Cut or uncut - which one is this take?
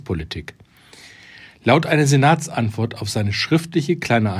uncut